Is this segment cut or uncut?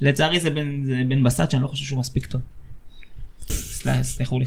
cut